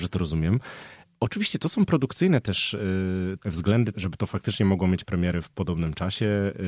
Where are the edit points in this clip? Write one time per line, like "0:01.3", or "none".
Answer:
0:03.9